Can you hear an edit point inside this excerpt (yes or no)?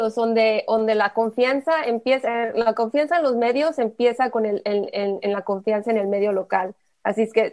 no